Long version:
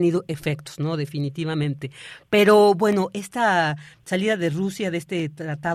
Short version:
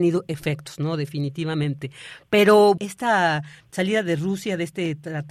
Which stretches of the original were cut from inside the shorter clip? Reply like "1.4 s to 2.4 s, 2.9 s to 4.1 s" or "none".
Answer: 2.8 s to 3.1 s